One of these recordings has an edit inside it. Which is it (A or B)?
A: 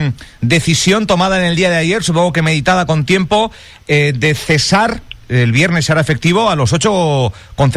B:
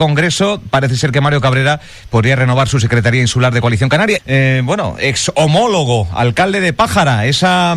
B